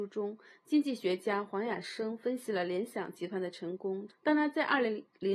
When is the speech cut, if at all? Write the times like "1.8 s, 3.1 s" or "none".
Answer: 4.1 s